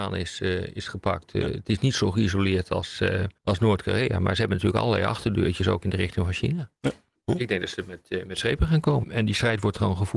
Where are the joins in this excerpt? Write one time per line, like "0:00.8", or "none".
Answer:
0:03.4
0:07.2
0:09.0